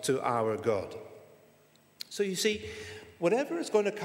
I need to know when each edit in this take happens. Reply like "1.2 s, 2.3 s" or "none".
none